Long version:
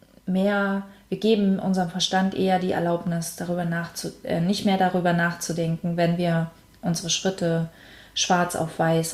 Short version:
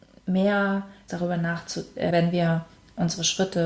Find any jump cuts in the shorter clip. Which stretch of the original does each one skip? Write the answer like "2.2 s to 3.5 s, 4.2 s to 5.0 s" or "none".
1.1 s to 3.4 s, 4.4 s to 6.0 s